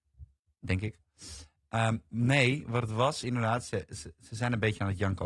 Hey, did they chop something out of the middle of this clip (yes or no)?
no